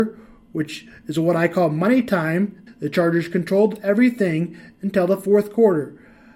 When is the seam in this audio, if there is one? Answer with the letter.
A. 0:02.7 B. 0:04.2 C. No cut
A